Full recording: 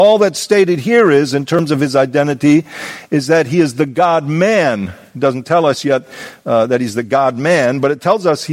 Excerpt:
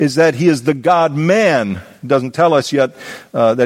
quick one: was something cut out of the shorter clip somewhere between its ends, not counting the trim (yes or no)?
no